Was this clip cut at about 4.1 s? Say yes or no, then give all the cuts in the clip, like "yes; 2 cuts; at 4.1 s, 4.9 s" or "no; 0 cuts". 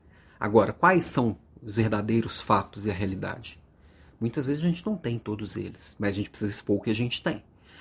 no; 0 cuts